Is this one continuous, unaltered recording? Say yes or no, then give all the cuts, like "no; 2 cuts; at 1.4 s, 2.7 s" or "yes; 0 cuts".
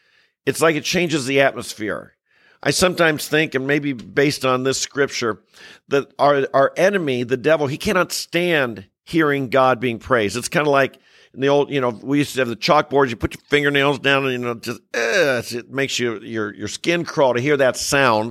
yes; 0 cuts